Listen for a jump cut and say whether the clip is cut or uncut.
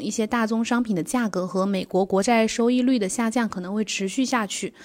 uncut